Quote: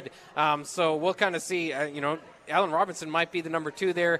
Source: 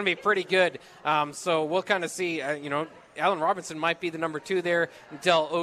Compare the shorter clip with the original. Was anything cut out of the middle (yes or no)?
no